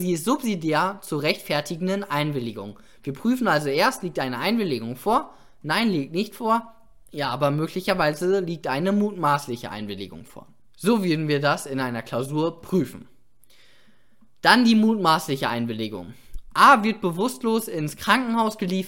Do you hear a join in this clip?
no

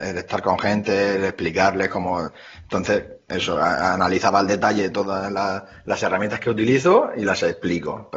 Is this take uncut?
yes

